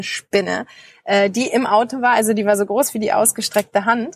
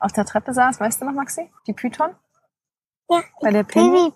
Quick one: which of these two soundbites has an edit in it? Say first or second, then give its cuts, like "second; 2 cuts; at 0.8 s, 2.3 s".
second; 1 cut; at 1.6 s